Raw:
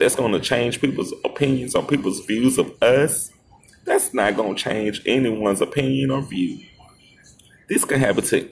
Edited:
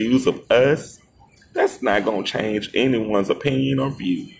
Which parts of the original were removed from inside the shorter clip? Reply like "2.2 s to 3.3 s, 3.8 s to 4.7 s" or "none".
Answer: none